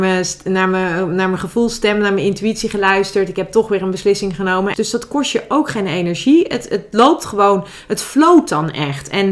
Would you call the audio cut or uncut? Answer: cut